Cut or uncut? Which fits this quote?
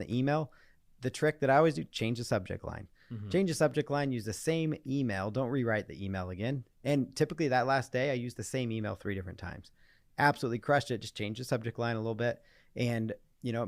uncut